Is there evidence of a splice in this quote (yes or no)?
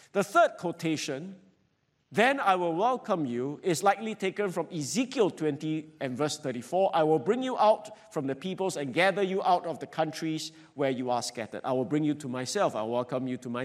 no